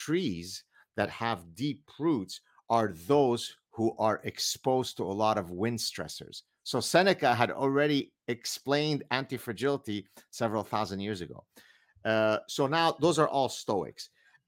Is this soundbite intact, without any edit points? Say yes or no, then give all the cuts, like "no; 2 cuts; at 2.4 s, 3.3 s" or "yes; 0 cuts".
yes; 0 cuts